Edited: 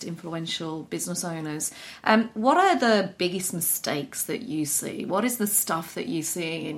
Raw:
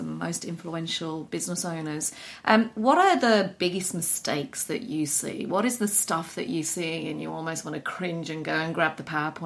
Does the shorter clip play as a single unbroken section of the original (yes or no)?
yes